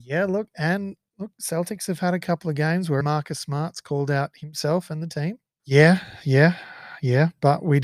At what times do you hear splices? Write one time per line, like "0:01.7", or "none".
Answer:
0:03.0
0:05.6